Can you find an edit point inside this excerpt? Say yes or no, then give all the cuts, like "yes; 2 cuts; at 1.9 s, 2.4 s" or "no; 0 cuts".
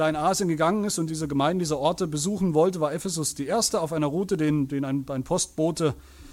yes; 1 cut; at 1.1 s